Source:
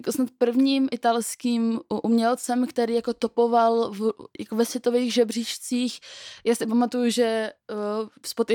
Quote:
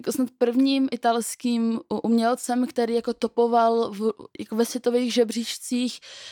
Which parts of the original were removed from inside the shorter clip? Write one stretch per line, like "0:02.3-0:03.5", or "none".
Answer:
none